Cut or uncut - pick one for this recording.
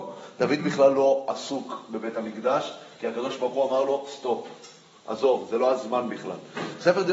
uncut